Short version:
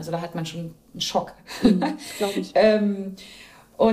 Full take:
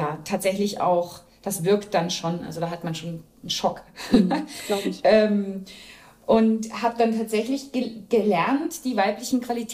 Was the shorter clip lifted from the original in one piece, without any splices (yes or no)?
yes